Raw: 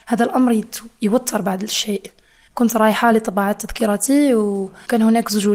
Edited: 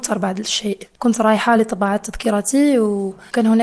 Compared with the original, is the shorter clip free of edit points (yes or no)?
no